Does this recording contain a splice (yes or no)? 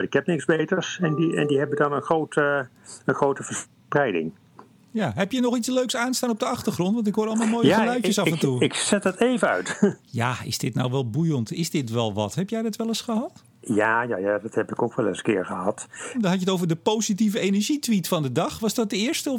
yes